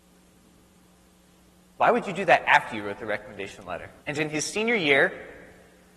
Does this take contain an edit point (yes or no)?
yes